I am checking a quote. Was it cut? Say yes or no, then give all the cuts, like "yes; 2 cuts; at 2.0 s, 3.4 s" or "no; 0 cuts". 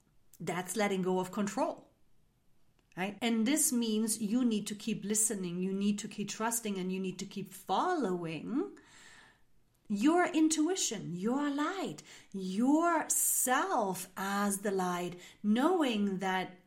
yes; 1 cut; at 3.2 s